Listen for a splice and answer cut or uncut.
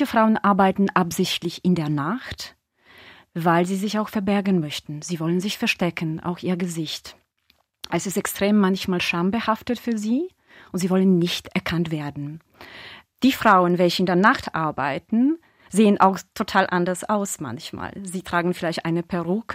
uncut